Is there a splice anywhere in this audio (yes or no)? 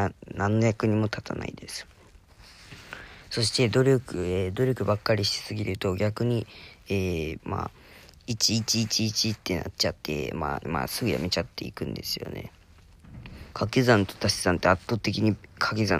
yes